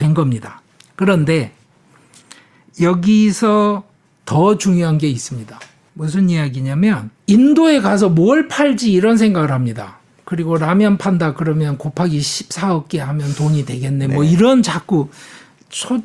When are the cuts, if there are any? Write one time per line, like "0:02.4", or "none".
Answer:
0:05.9
0:07.2